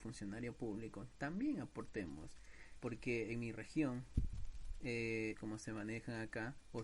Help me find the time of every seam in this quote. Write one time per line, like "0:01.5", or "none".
0:02.8
0:05.3